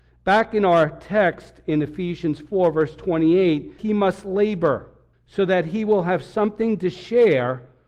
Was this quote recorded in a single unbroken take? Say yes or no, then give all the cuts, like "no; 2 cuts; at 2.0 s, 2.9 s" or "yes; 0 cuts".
no; 2 cuts; at 3.8 s, 5.1 s